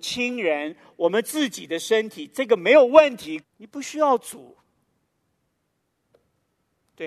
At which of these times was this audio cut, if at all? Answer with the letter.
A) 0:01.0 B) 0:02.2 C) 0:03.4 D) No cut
C